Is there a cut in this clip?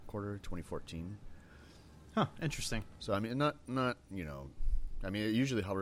no; 0 cuts

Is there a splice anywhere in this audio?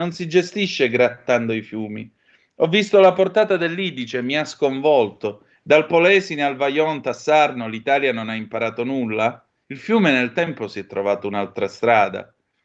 yes; 2 cuts; at 5.6 s, 9.6 s

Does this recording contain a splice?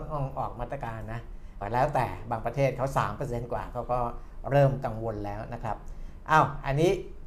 yes; 1 cut; at 1.6 s

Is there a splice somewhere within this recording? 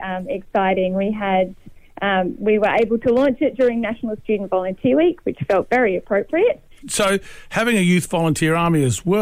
yes; 1 cut; at 6.8 s

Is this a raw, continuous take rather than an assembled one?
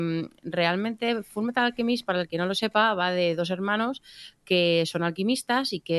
yes; 0 cuts

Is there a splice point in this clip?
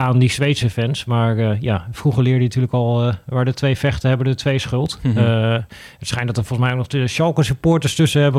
no; 0 cuts

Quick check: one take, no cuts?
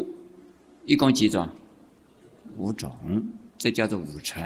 yes; 0 cuts

